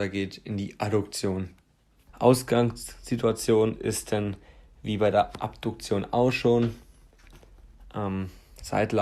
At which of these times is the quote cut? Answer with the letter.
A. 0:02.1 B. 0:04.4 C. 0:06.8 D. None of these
A